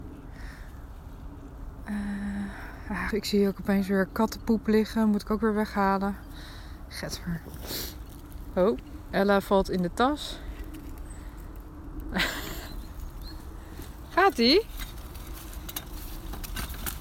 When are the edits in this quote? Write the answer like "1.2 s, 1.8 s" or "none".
3.1 s